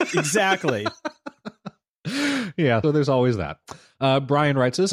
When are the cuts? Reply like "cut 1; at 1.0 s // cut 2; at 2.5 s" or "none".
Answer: cut 1; at 2.8 s